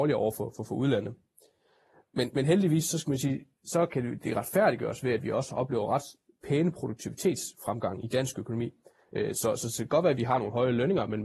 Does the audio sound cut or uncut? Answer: uncut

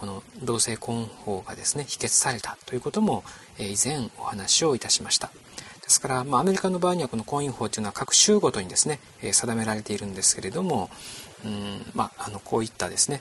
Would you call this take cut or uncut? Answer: uncut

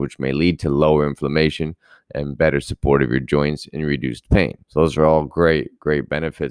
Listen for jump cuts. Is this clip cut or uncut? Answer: cut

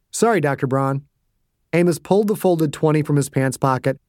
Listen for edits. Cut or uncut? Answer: cut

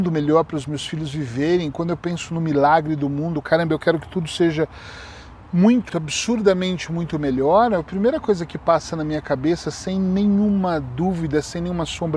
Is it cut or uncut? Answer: cut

